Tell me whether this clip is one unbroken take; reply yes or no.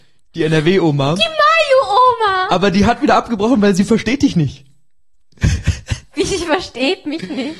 yes